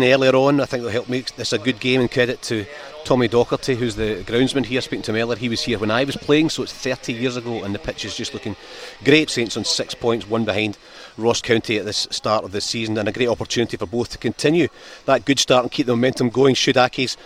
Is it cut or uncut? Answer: cut